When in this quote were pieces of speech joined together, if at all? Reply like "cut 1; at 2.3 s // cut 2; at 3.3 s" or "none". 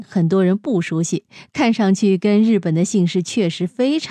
none